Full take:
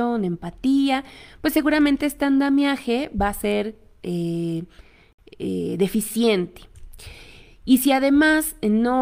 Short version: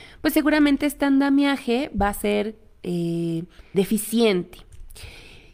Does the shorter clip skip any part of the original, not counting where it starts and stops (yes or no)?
yes